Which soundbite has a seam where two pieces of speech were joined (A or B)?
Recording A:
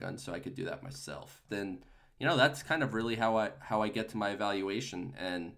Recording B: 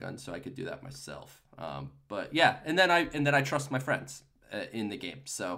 A